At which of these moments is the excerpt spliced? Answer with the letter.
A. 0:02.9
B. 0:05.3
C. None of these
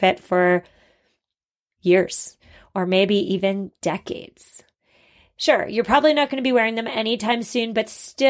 C